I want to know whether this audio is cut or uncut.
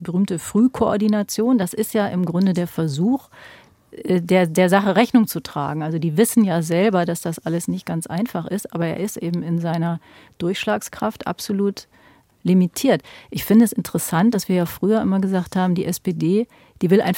uncut